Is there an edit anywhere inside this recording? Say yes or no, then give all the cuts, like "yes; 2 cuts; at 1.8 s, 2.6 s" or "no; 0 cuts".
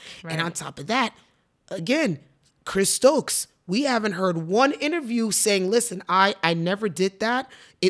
no; 0 cuts